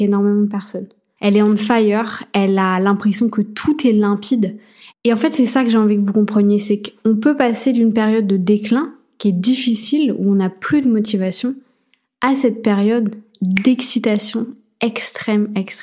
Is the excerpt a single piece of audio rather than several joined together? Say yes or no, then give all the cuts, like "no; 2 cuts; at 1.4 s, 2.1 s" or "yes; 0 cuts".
no; 2 cuts; at 1.2 s, 4.9 s